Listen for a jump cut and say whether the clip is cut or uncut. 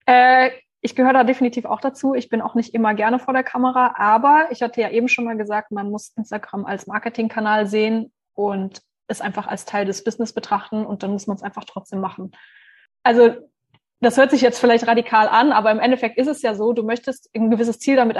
uncut